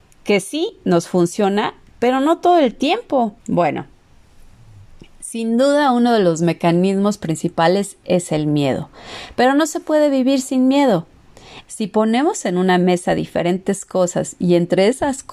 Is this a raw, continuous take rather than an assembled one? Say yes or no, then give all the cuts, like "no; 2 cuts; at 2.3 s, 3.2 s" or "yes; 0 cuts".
no; 2 cuts; at 3.4 s, 11.6 s